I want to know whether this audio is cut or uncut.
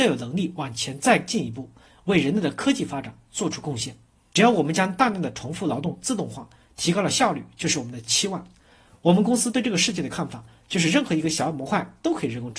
cut